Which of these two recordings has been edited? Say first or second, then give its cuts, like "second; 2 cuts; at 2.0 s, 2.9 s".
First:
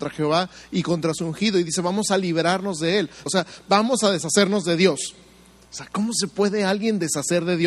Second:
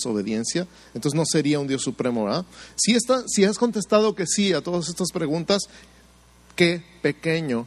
first; 2 cuts; at 3.3 s, 5.7 s